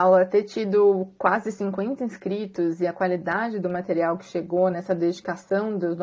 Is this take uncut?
no; 1 cut; at 4.7 s

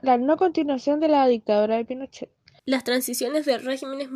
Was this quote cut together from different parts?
yes; 1 cut; at 2.6 s

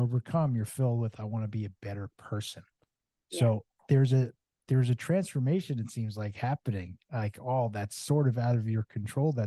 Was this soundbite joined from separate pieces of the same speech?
no; 0 cuts

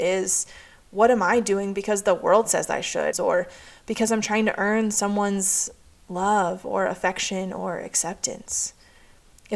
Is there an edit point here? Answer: yes; 1 cut; at 3.1 s

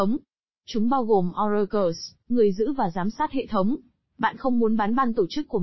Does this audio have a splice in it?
yes; 1 cut; at 4.1 s

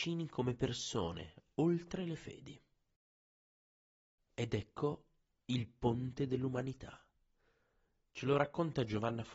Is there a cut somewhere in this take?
no; 0 cuts

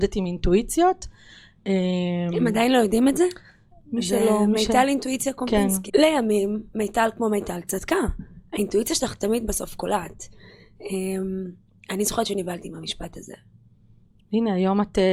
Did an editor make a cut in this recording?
yes; 2 cuts; at 3.7 s, 5.9 s

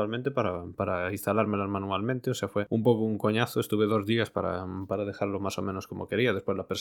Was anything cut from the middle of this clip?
no; 0 cuts

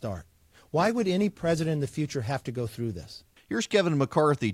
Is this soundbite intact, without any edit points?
no; 1 cut; at 3.4 s

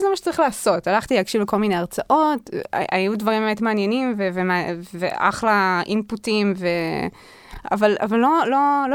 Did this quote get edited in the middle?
no; 0 cuts

